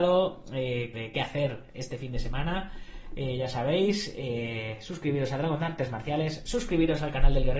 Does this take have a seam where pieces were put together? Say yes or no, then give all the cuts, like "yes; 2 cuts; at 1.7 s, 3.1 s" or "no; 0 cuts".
yes; 1 cut; at 0.9 s